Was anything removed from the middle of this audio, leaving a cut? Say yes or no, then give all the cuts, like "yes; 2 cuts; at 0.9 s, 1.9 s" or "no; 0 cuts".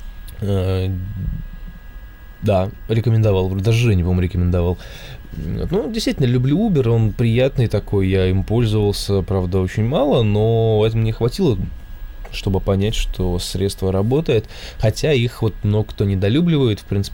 no; 0 cuts